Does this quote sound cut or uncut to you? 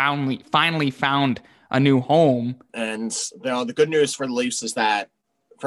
cut